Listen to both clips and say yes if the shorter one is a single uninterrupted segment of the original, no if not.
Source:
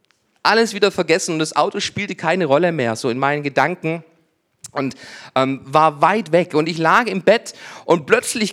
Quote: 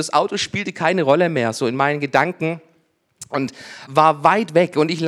no